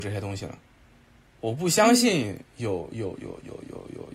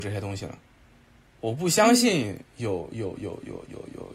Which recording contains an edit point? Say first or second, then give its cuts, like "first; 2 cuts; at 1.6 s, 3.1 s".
first; 1 cut; at 3.2 s